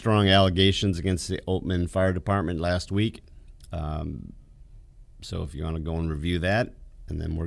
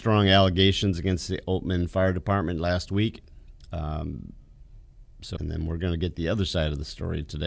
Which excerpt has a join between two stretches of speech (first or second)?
second